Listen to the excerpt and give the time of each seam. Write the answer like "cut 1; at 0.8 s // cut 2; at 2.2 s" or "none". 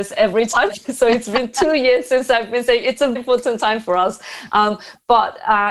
cut 1; at 3.2 s